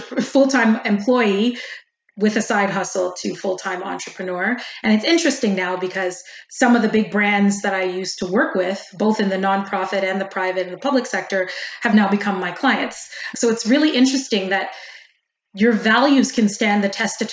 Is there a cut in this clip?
yes; 1 cut; at 13.3 s

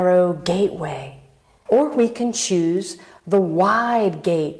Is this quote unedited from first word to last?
no; 1 cut; at 1.7 s

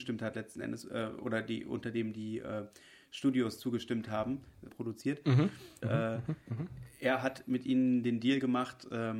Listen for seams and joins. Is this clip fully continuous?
no; 2 cuts; at 4.7 s, 5.8 s

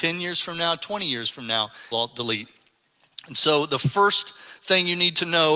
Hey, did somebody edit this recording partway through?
yes; 1 cut; at 1.9 s

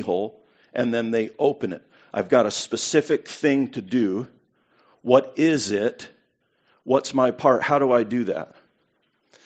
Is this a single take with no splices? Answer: yes; 0 cuts

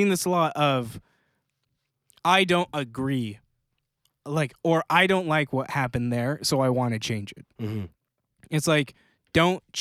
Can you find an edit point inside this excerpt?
no; 0 cuts

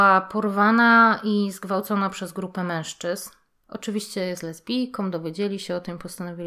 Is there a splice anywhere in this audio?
no; 0 cuts

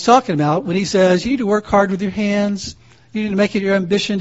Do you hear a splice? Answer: no; 0 cuts

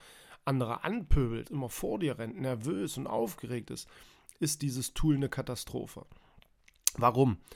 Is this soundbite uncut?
no; 1 cut; at 1.4 s

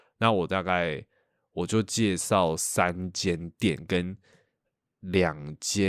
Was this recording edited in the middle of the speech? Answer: no; 0 cuts

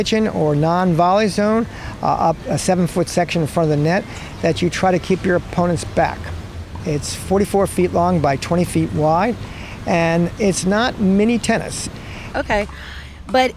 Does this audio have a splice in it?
yes; 2 cuts; at 6.8 s, 12.3 s

